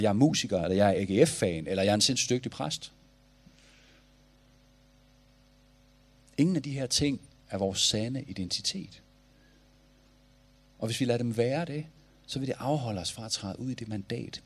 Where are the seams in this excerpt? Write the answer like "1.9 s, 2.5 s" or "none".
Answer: none